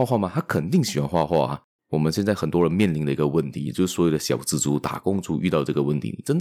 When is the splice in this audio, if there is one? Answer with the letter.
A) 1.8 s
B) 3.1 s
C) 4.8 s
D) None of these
A